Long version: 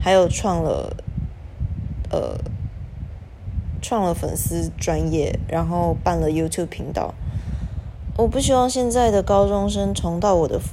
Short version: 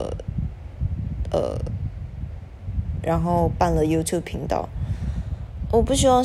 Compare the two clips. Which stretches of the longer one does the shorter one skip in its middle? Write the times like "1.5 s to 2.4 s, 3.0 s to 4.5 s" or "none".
3.8 s to 5.5 s